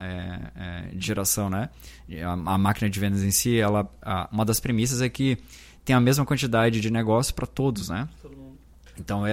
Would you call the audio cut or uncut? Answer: uncut